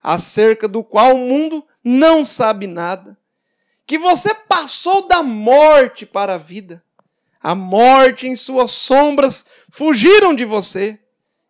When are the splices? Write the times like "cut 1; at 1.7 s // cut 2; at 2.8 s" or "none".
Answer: none

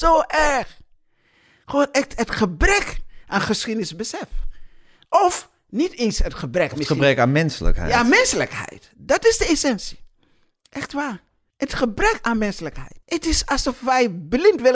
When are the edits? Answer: cut 1; at 11.5 s // cut 2; at 13.0 s

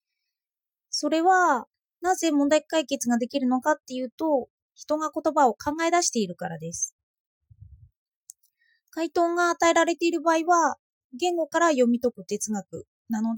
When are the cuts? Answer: none

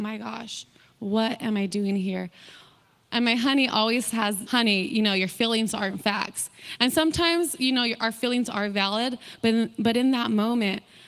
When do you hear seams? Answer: cut 1; at 3.1 s // cut 2; at 4.4 s

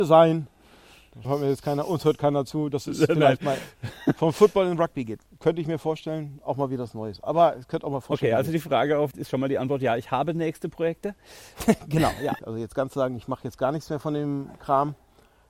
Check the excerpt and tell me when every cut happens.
cut 1; at 1.2 s // cut 2; at 9.1 s // cut 3; at 12.4 s

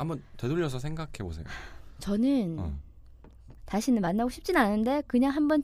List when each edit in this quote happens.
cut 1; at 3.6 s

